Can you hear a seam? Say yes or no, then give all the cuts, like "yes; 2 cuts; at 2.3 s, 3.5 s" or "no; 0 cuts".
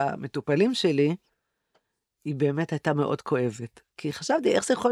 yes; 1 cut; at 3.9 s